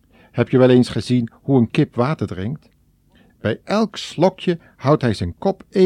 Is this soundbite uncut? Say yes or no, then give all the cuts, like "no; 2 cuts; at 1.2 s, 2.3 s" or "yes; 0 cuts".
no; 1 cut; at 3.3 s